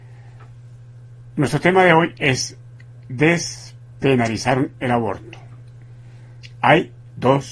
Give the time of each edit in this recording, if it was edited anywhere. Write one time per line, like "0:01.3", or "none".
none